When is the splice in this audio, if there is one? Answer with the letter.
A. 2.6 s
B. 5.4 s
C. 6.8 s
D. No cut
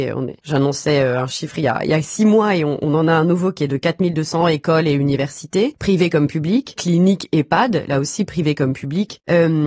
C